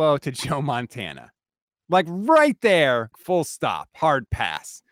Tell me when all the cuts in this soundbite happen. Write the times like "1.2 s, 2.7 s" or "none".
3.1 s